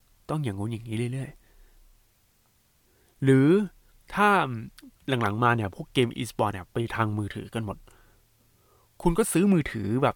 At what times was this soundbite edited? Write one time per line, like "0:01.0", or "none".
0:05.0